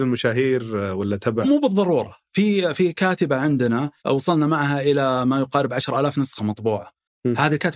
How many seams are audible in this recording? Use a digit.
2